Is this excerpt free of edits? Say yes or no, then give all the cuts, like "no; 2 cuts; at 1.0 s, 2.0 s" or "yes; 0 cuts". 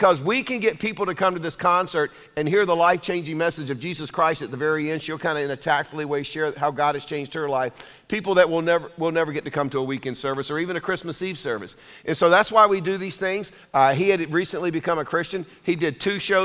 no; 1 cut; at 13.6 s